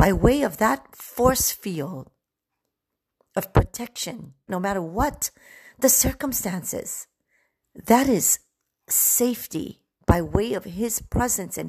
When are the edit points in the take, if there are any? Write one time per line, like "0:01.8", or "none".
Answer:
0:04.5
0:07.6
0:09.9